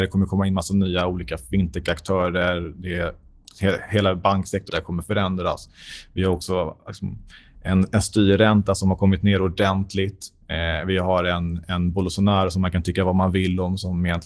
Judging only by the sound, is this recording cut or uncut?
cut